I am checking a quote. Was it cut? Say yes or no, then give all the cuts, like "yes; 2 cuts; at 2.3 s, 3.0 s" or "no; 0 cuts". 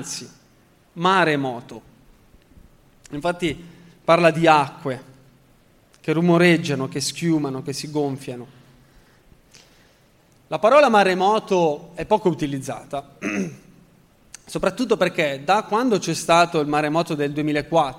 no; 0 cuts